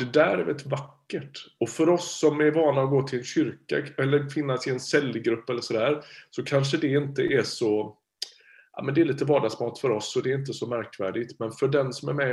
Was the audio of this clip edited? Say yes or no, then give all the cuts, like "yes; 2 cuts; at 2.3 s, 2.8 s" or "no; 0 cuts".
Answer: no; 0 cuts